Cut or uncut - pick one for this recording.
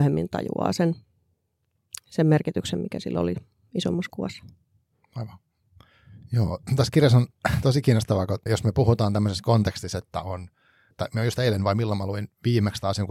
cut